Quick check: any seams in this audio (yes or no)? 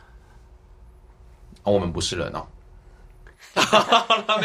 no